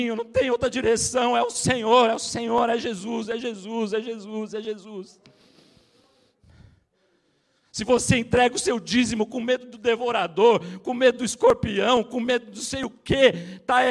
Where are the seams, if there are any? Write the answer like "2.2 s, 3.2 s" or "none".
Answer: none